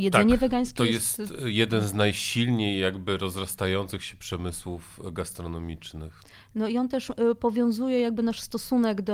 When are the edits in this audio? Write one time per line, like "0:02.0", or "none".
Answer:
none